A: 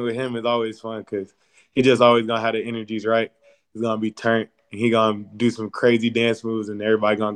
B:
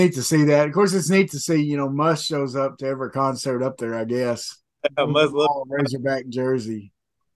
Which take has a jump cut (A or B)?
B